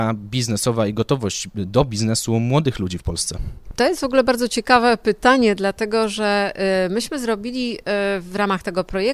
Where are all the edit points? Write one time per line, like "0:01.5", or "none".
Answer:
none